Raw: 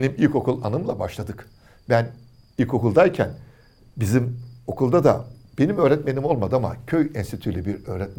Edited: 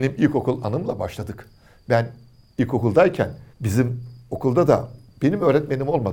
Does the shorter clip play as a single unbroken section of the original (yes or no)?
no